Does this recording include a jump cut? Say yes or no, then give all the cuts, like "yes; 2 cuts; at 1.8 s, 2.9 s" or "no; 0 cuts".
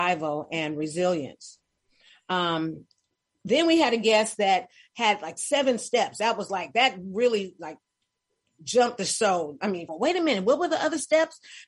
yes; 1 cut; at 9.9 s